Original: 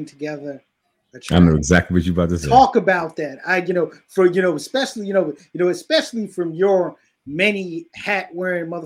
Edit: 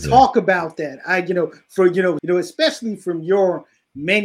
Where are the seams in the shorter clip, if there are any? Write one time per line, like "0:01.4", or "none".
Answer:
0:02.2